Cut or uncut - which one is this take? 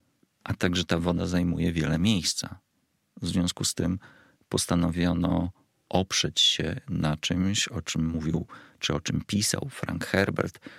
uncut